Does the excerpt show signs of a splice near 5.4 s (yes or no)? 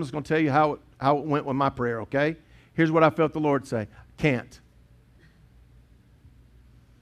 no